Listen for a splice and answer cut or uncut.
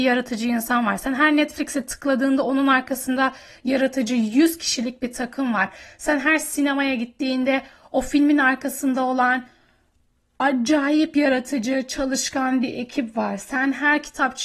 uncut